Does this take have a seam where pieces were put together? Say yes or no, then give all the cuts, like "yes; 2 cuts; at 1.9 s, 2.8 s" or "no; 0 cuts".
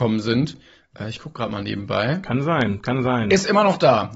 no; 0 cuts